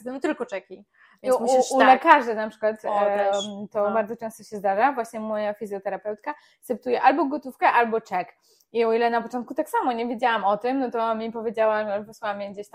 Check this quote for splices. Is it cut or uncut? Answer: uncut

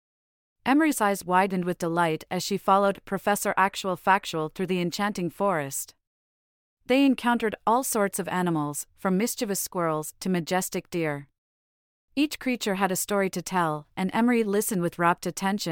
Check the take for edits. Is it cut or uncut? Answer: uncut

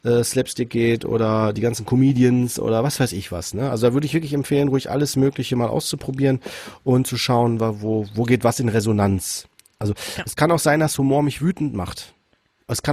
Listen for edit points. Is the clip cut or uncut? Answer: uncut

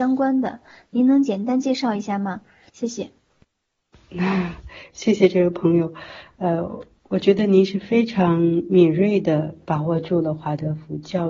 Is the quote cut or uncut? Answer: cut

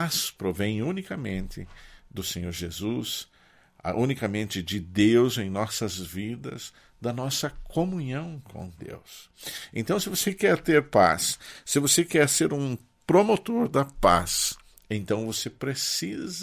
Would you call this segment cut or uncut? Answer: uncut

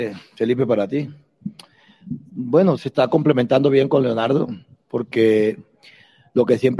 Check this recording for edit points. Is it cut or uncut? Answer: cut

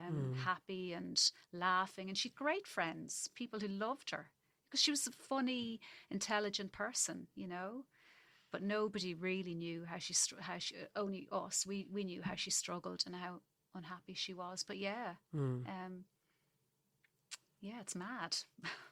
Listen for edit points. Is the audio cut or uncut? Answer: uncut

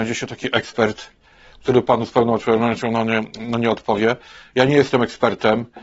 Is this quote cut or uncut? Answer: uncut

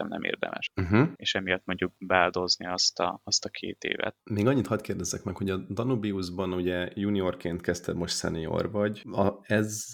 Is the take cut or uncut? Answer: cut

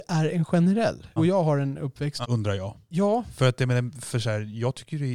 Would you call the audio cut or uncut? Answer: cut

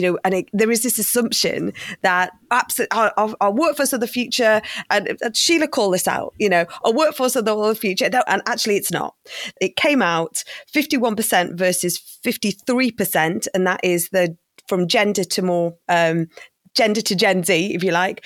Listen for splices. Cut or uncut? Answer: cut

